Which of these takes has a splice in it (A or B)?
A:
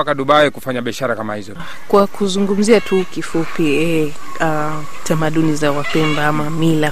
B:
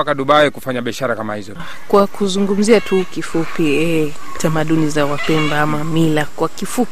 B